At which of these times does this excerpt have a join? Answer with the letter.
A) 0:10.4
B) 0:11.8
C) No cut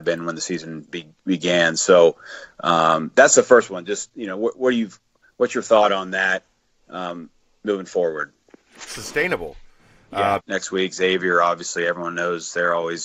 A